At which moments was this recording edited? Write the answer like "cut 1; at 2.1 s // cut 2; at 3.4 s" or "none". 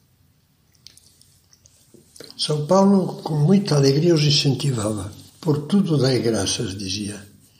cut 1; at 2.3 s // cut 2; at 5.3 s